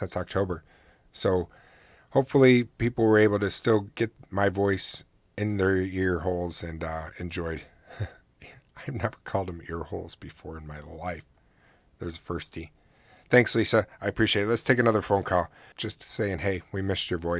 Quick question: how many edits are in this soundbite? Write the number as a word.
one